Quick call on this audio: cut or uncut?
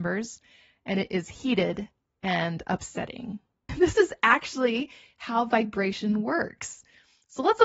cut